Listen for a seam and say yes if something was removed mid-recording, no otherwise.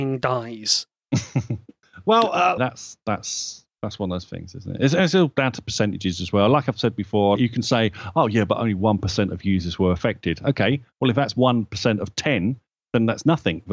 yes